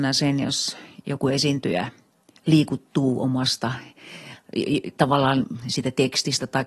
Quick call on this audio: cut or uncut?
uncut